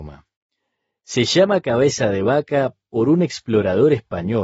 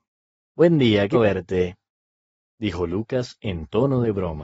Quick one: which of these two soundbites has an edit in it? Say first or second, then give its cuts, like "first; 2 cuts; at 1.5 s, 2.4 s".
second; 1 cut; at 1.1 s